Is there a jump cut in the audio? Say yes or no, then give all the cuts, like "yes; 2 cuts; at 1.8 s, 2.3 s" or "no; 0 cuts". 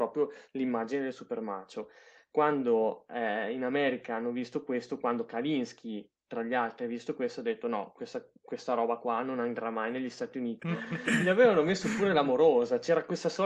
yes; 1 cut; at 10.6 s